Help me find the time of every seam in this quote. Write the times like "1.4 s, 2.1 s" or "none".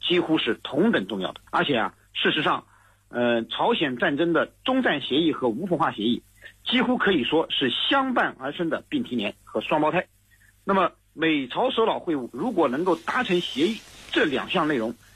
1.5 s